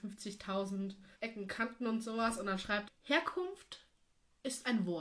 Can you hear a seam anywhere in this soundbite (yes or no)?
yes